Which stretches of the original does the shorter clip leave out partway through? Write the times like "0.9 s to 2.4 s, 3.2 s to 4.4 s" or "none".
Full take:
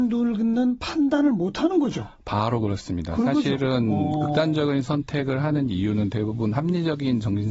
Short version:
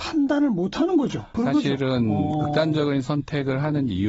2.2 s to 3.2 s